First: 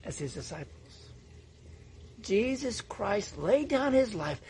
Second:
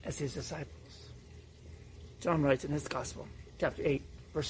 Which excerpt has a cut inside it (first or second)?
first